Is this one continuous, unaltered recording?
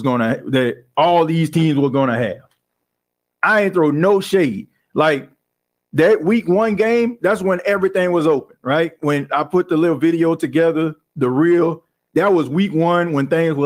yes; 0 cuts

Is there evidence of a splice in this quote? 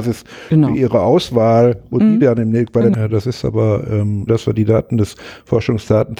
yes; 2 cuts; at 2.9 s, 4.3 s

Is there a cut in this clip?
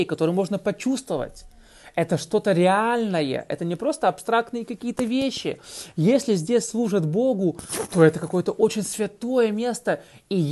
no; 0 cuts

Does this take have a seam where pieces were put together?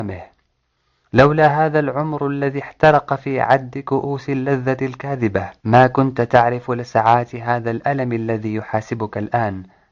yes; 1 cut; at 5.6 s

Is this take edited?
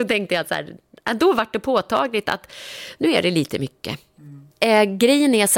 no; 0 cuts

